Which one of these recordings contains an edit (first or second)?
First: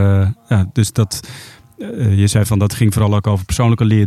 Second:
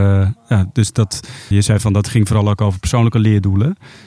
second